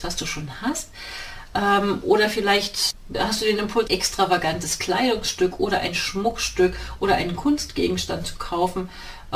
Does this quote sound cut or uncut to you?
cut